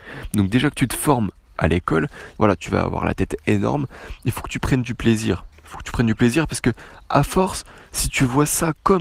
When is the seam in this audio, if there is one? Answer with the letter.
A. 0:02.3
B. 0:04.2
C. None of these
A